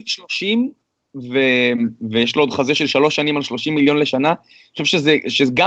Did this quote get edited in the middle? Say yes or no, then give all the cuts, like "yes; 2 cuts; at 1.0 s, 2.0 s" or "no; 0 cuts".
no; 0 cuts